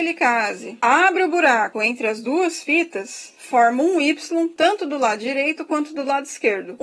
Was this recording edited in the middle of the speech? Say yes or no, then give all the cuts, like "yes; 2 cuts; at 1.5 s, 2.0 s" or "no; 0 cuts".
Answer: no; 0 cuts